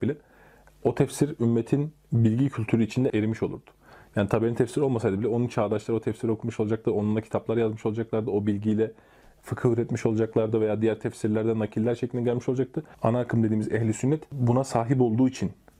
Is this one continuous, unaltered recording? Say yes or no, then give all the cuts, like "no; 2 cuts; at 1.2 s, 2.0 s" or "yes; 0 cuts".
no; 2 cuts; at 3.1 s, 12.9 s